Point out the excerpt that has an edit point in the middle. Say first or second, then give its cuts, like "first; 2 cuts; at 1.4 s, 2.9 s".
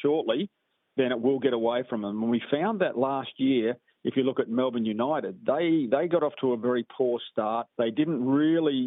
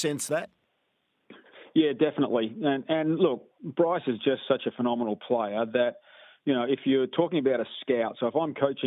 first; 1 cut; at 7.7 s